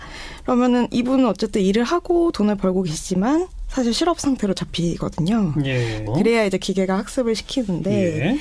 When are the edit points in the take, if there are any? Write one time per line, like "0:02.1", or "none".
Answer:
0:06.1